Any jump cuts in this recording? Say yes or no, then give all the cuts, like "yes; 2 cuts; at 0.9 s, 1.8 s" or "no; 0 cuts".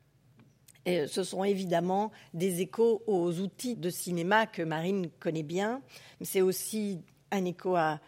yes; 1 cut; at 3.7 s